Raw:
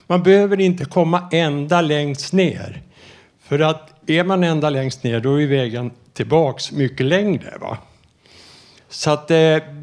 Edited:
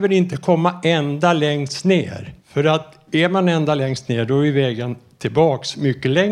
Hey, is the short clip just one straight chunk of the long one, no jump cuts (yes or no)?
no